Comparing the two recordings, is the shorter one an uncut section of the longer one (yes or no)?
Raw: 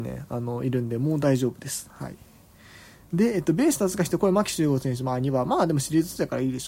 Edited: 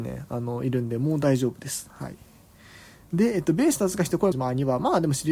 no